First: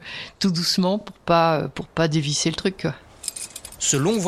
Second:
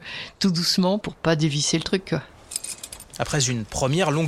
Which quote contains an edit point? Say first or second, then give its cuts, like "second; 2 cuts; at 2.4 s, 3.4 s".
second; 2 cuts; at 1.0 s, 3.0 s